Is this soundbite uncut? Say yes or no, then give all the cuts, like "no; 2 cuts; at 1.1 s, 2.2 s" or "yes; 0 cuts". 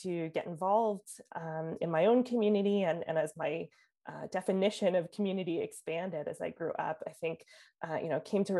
yes; 0 cuts